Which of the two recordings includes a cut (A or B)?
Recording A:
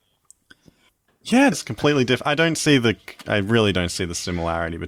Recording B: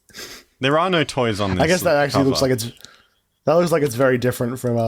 A